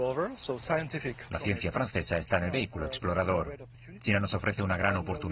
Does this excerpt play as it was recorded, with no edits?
no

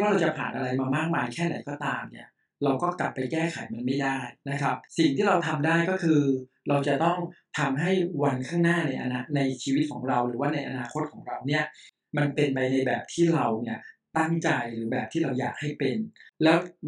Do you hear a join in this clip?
yes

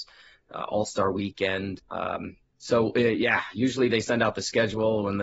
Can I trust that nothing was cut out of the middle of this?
no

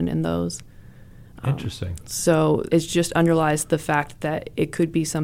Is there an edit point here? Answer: yes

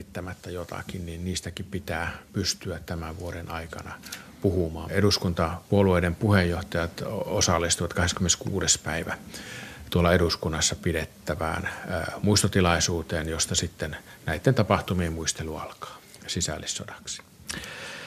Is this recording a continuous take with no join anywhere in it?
no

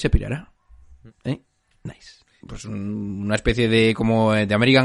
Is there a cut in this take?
yes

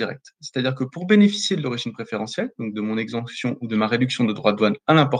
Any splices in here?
no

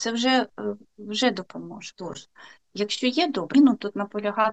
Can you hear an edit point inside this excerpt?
yes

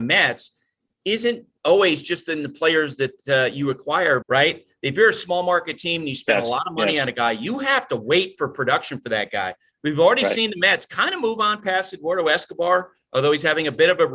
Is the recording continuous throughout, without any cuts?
no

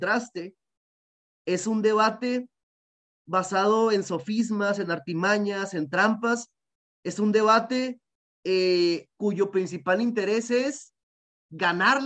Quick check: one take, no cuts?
yes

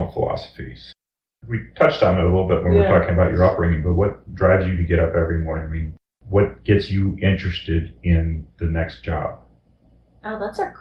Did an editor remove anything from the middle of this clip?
no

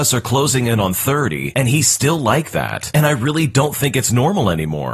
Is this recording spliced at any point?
no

